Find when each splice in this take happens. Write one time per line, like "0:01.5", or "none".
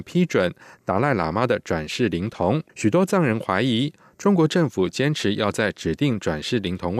0:02.7